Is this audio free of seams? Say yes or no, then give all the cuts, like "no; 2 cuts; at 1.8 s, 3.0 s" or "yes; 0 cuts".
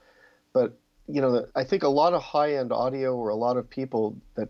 no; 1 cut; at 1.5 s